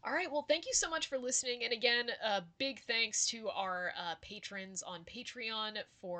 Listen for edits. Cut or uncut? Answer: uncut